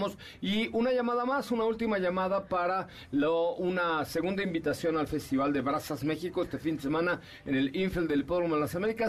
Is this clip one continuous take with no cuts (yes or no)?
yes